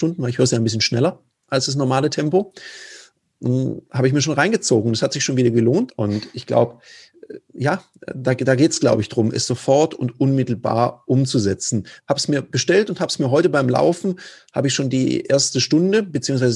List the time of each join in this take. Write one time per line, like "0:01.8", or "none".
0:05.9
0:12.0